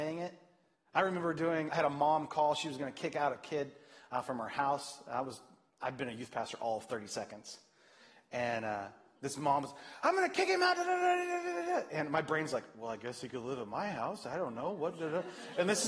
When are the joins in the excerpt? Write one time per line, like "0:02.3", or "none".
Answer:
0:01.7